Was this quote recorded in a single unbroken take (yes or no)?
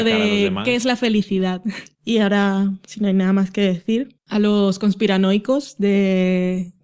no